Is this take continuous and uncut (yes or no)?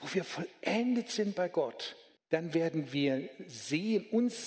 no